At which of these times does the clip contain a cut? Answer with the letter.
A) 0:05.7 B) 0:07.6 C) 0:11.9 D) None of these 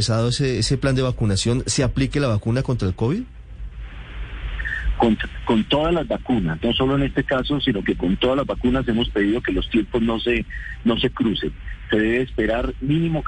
D